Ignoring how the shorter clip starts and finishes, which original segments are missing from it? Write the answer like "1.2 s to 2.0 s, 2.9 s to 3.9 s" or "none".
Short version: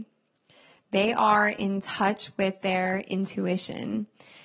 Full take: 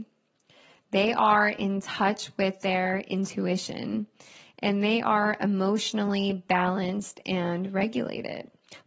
none

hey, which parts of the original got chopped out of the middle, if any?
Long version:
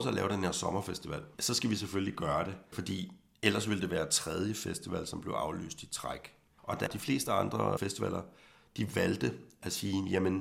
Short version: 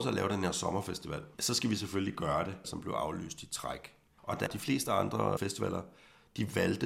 2.6 s to 5.0 s

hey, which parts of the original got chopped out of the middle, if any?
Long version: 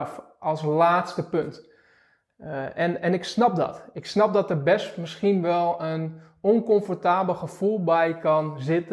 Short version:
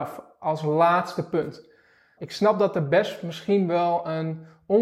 2.2 s to 3.9 s

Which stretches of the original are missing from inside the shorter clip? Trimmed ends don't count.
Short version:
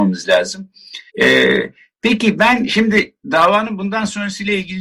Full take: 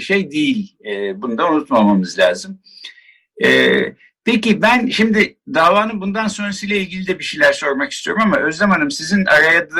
3.0 s to 3.3 s

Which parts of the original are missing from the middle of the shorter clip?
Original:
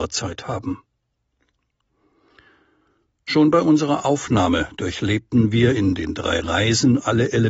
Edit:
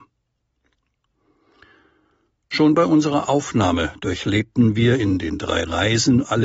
none

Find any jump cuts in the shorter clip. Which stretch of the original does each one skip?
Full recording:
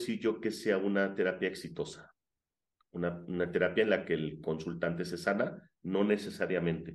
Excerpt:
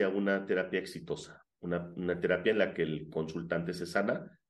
2.2 s to 2.8 s

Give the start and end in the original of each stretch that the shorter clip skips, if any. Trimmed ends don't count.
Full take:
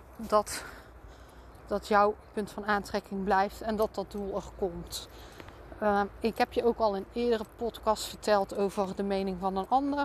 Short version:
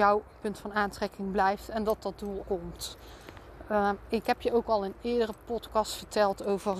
4.3 s to 4.5 s

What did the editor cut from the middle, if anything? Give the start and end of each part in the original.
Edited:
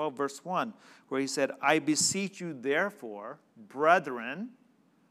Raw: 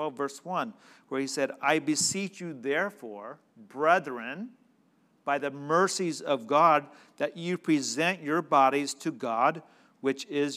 none

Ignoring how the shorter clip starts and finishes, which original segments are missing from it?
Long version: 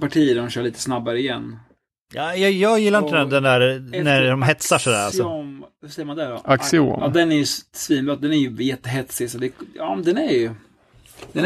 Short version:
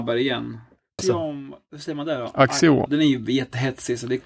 2.0 s to 5.1 s, 7.0 s to 8.2 s

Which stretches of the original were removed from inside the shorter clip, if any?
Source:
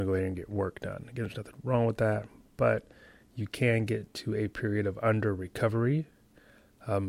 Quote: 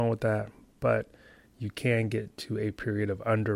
none

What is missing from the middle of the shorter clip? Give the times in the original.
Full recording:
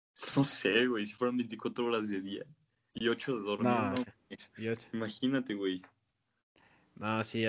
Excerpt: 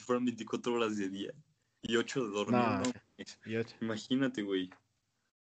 none

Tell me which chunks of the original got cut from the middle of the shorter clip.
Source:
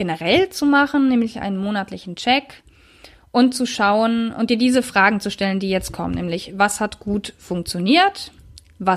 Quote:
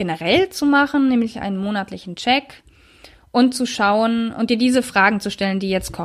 none

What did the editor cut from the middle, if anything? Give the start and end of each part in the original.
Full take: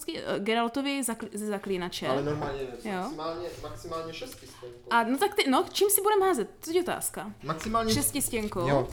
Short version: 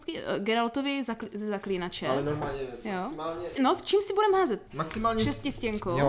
3.6 s to 5.4 s, 6.5 s to 7.4 s

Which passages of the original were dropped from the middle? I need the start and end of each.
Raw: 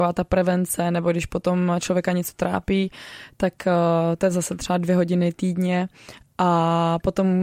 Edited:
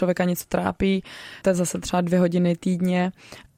3.3 s to 4.2 s

